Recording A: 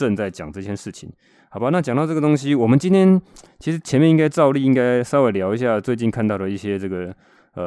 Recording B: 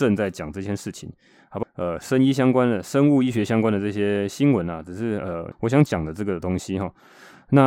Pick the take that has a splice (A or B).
B